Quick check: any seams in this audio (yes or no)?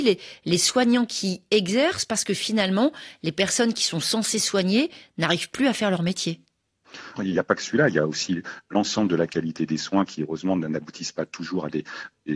yes